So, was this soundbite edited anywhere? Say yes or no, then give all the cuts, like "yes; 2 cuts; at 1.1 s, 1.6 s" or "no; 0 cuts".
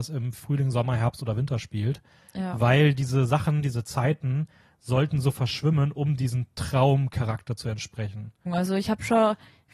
yes; 1 cut; at 8.5 s